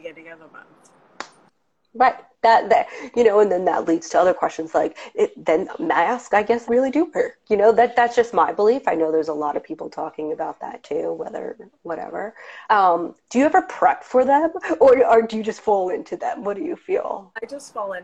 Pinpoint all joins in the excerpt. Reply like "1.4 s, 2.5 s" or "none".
6.7 s, 12.6 s

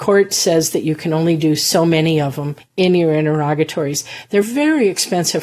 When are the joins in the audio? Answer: none

